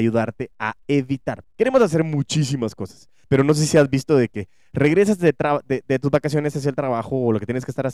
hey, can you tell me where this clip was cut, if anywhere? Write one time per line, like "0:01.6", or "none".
0:01.4
0:03.2